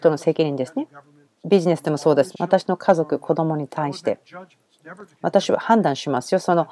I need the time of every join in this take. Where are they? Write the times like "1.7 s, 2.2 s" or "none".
1.2 s, 2.3 s